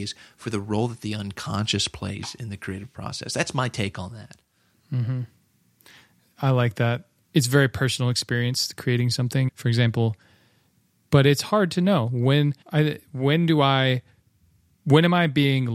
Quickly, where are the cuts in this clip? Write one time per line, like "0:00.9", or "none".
0:07.2
0:09.5
0:12.6